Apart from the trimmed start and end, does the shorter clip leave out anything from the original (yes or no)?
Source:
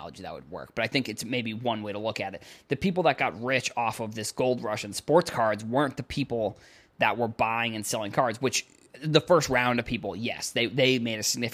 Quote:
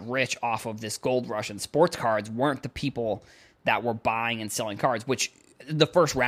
no